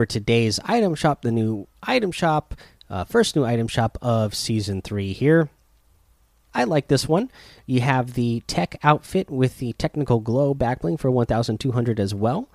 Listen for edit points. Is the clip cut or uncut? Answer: cut